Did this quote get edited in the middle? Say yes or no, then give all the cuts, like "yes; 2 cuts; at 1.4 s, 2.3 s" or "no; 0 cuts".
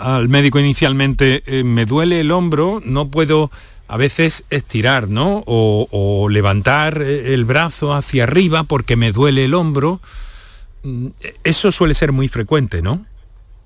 no; 0 cuts